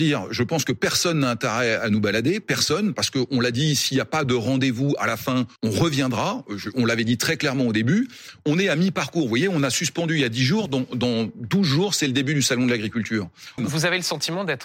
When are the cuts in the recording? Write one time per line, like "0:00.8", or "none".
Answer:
0:05.6
0:13.6